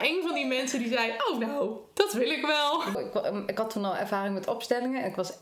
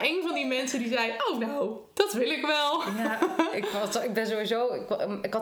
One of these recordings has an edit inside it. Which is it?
first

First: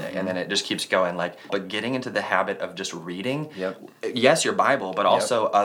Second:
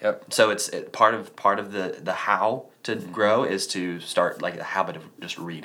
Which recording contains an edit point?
first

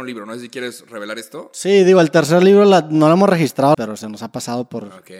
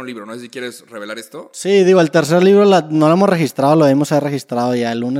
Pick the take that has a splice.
first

